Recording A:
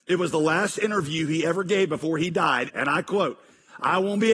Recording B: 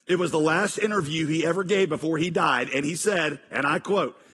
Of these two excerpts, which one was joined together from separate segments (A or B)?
A